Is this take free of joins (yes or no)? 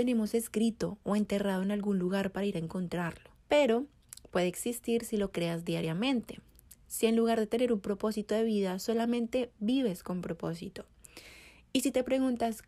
no